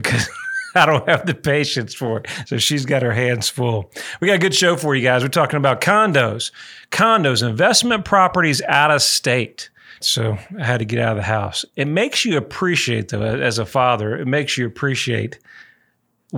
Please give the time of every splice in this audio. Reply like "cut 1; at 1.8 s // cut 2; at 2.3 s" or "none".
cut 1; at 10.0 s